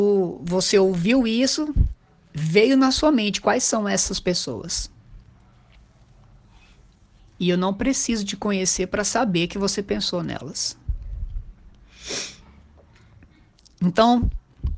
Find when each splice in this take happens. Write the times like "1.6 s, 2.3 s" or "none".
none